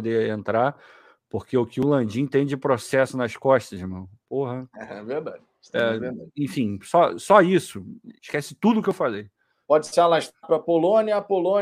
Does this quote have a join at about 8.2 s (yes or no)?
yes